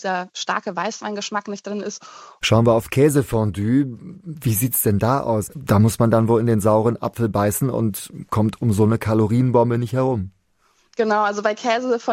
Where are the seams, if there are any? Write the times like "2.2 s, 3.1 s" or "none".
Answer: 2.4 s, 5.5 s